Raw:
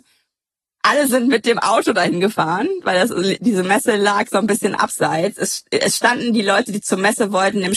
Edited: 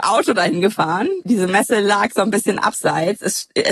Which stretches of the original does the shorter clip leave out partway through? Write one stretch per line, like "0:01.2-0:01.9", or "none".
0:02.8-0:03.4